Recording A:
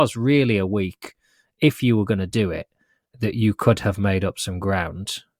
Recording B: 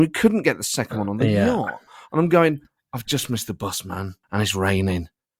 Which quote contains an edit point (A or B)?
B